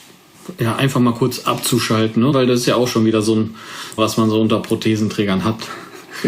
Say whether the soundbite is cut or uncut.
cut